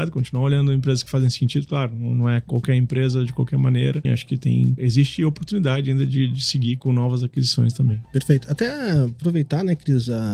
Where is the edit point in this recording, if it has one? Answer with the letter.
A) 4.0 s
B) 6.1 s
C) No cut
A